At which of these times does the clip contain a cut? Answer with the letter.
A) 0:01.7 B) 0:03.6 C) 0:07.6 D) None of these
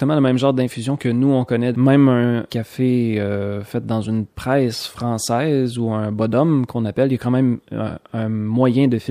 A